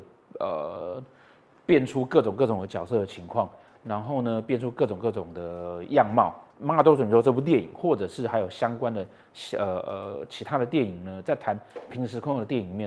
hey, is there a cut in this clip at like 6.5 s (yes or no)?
yes